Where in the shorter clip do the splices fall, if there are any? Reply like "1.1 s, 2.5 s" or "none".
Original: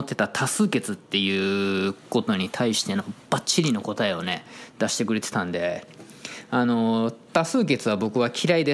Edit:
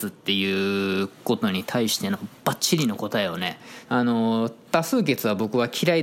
3.8 s